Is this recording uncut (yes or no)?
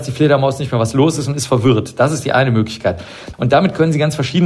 no